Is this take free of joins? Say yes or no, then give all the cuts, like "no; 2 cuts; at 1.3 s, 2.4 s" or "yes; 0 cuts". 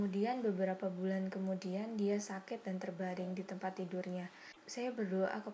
yes; 0 cuts